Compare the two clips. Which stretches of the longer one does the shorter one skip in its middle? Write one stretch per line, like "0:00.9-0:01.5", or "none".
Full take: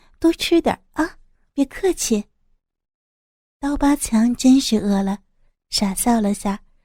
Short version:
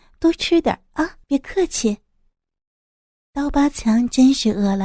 0:01.2-0:01.5